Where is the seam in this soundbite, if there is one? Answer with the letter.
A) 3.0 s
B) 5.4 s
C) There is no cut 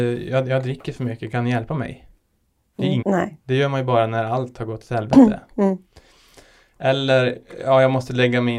A